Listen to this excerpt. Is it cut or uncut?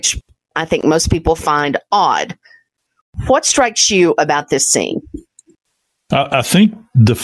uncut